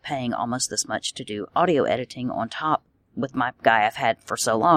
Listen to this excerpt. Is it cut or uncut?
cut